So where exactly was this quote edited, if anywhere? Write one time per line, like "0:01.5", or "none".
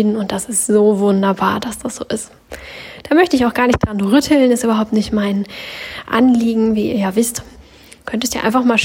0:07.5